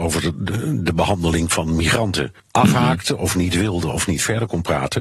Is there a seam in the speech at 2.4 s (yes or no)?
yes